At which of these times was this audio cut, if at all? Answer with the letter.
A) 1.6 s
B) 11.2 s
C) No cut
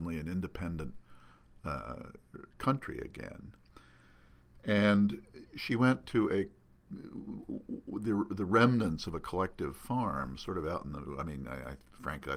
C